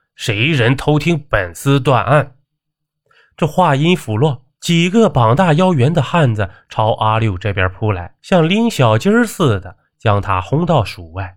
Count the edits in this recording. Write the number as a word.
one